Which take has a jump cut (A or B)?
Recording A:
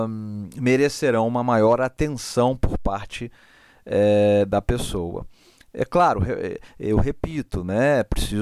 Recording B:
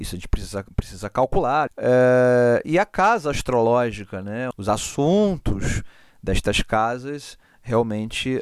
B